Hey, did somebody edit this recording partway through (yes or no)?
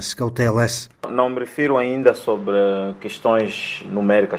yes